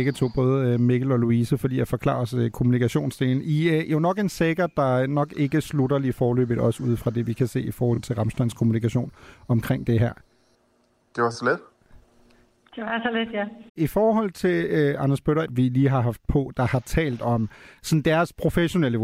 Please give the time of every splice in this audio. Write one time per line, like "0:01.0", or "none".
0:13.7
0:15.4